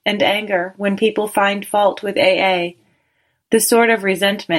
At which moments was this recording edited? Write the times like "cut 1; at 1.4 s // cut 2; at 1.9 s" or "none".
cut 1; at 3.4 s